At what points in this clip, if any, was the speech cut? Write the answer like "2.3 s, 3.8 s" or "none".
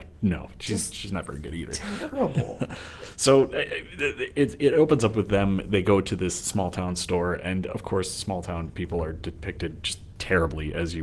none